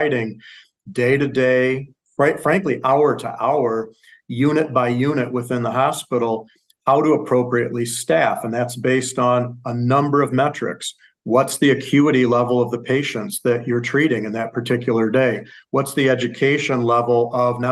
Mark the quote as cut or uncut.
uncut